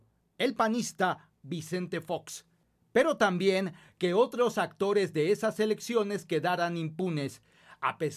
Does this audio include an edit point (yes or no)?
no